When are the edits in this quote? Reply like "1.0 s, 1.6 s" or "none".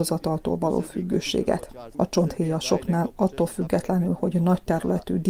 1.9 s